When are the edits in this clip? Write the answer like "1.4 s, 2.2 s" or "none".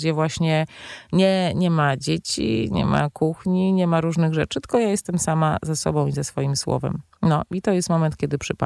none